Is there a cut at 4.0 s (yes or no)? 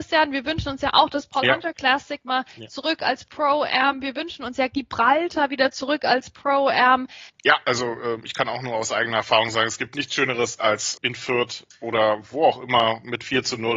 no